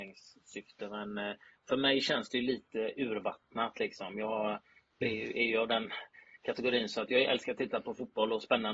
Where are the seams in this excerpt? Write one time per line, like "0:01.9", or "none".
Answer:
none